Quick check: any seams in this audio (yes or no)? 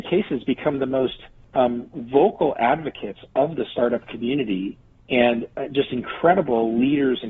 yes